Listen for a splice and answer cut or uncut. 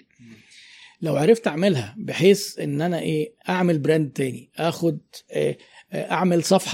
cut